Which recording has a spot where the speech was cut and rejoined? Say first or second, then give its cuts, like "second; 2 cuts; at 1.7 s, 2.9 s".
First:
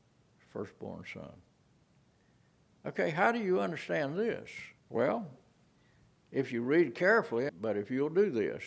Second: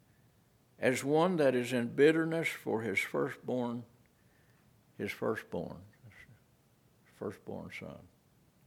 first; 2 cuts; at 4.8 s, 7.5 s